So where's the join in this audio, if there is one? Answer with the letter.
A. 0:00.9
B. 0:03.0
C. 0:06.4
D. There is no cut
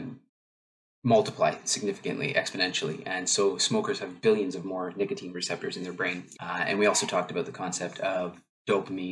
C